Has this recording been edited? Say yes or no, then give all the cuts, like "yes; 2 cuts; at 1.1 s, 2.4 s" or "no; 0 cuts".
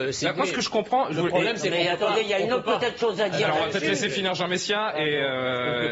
no; 0 cuts